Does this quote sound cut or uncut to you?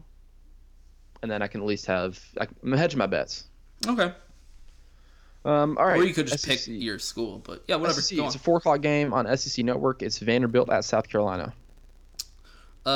uncut